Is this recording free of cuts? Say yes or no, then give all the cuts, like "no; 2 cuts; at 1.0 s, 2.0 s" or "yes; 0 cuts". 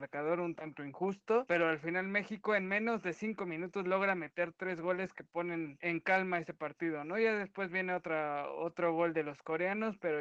yes; 0 cuts